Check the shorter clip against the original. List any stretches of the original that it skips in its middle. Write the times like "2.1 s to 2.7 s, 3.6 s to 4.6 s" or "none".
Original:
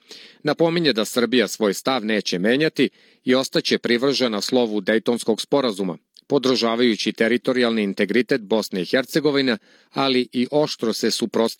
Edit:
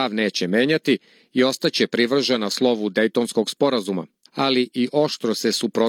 6.2 s to 9.8 s